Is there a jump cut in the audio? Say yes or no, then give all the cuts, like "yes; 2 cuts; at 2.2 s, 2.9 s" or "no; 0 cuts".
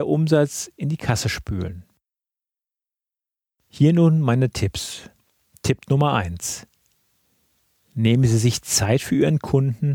no; 0 cuts